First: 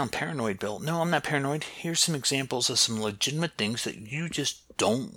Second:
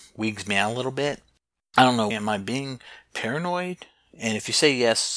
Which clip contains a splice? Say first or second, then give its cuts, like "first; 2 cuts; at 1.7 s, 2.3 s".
second; 1 cut; at 2.1 s